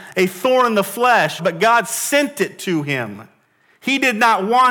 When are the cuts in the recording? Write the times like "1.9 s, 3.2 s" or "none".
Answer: 1.4 s